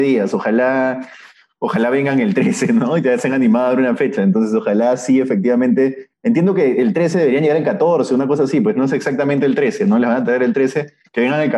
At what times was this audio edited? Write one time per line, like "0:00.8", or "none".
none